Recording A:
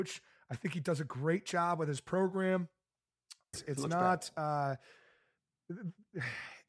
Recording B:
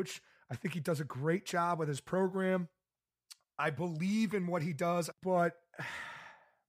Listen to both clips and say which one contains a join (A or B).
A